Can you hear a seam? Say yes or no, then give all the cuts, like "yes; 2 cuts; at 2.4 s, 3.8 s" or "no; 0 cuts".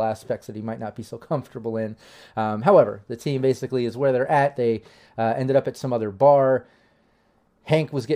no; 0 cuts